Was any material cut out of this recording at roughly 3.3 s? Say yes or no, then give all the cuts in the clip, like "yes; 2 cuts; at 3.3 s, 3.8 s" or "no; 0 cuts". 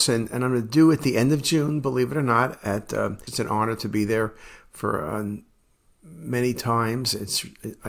yes; 1 cut; at 3.3 s